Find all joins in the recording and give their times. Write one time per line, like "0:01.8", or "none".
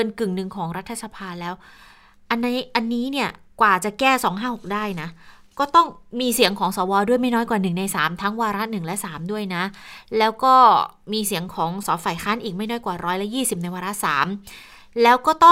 0:11.8